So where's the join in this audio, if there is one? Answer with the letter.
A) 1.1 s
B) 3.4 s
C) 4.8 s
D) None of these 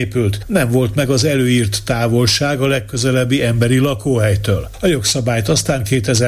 D